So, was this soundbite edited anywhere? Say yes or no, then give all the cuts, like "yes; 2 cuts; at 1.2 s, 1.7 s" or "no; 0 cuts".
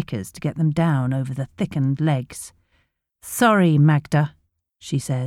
no; 0 cuts